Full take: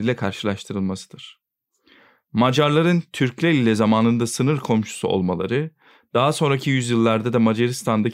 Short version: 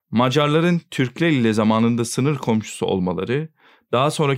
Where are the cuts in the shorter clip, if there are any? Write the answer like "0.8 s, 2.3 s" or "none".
none